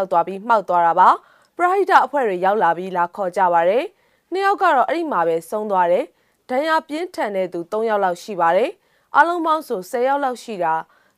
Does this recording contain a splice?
no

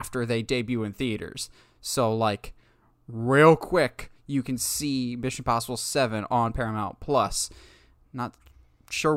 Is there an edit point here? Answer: no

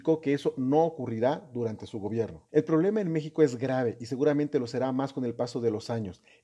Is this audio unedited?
no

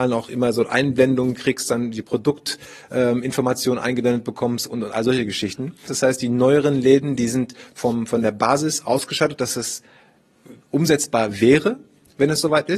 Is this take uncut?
no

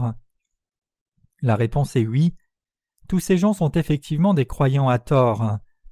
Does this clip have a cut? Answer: no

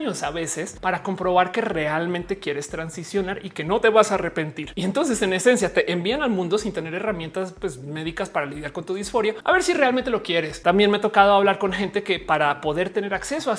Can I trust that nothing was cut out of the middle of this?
no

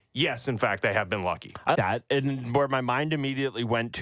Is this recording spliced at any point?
yes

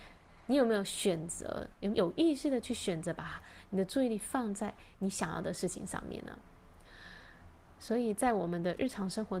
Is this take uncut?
no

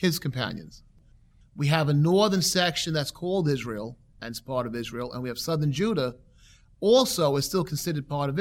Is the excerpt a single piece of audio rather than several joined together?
no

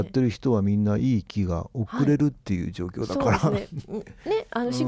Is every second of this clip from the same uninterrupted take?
yes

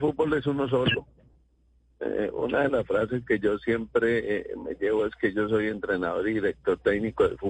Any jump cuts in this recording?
no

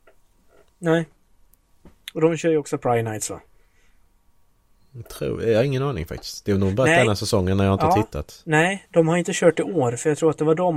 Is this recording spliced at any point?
no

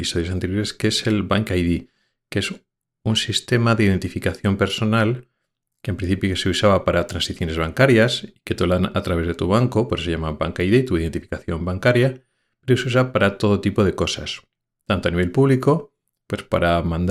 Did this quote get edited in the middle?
no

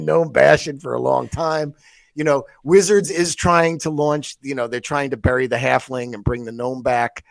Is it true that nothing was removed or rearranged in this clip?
yes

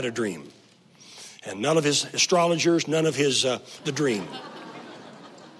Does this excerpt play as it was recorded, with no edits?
no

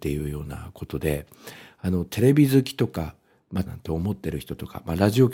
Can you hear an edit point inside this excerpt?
yes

